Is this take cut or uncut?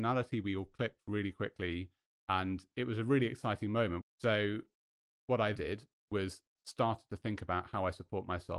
cut